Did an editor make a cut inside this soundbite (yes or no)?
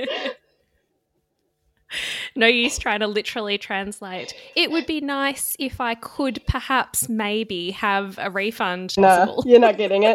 yes